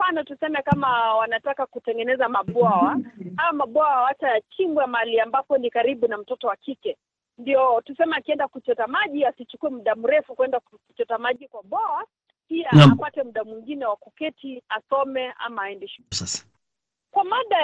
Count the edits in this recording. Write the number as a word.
one